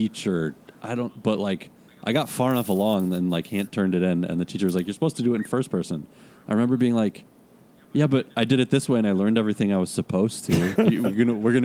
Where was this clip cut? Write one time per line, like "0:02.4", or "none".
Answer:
0:10.8